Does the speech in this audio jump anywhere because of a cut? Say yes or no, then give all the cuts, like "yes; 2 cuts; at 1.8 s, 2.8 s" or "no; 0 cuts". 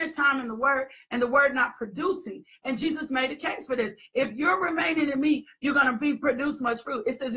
yes; 1 cut; at 3.1 s